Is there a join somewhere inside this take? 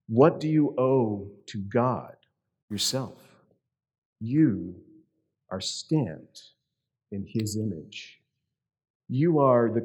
yes; 1 cut; at 2.6 s

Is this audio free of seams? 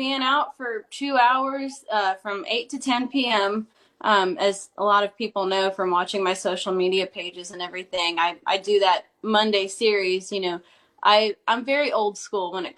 no; 1 cut; at 3.8 s

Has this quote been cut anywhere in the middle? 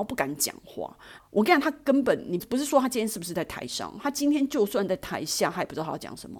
yes; 2 cuts; at 1.2 s, 2.4 s

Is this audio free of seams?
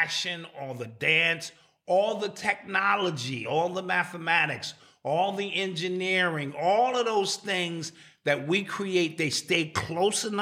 yes; 0 cuts

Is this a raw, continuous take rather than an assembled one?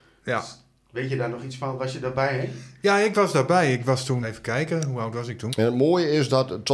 no; 2 cuts; at 4.2 s, 5.5 s

